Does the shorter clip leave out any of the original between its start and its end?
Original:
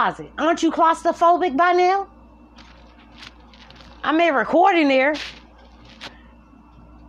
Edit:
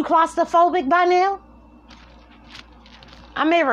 no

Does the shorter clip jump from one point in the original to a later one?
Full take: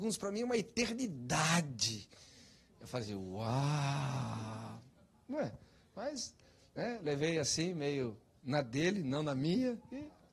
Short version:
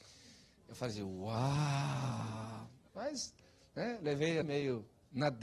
yes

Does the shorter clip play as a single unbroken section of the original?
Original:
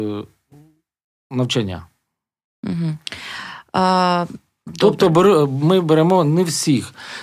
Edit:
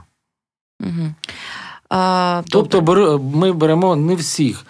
no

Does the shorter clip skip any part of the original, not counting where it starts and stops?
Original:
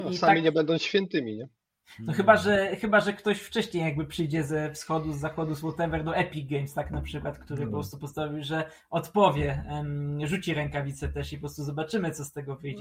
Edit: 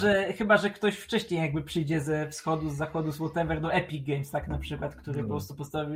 no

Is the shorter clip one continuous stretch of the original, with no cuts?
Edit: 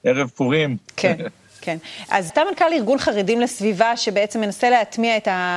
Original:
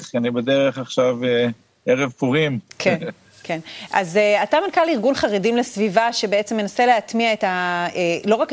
no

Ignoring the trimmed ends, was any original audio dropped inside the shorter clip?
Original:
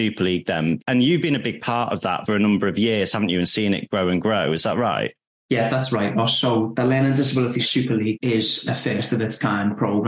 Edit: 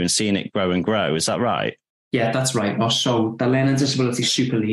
no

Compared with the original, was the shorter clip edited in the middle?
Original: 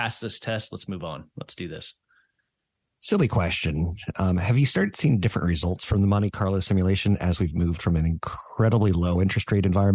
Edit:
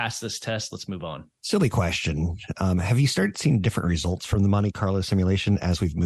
yes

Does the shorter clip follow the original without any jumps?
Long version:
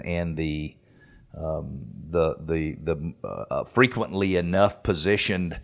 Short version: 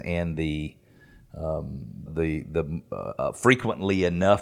no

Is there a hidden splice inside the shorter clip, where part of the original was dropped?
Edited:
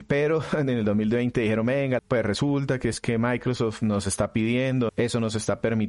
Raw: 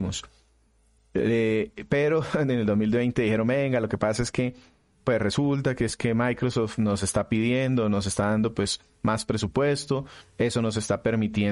yes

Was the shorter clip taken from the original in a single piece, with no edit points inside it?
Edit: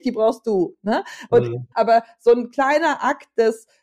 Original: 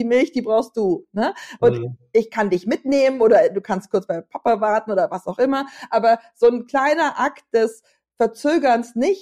no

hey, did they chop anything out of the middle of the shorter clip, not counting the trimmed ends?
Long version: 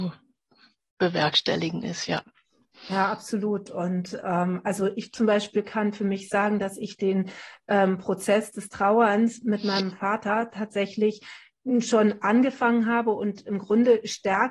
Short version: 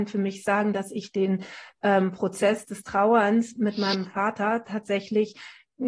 no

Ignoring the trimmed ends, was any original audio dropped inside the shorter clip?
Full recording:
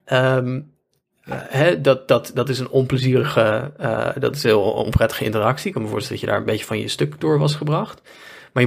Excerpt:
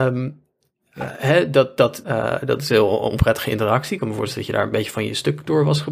yes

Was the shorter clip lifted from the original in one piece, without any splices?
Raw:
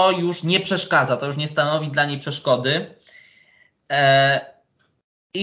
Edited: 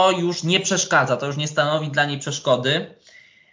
yes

